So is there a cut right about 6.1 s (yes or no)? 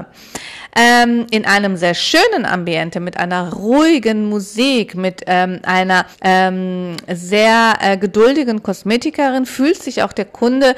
yes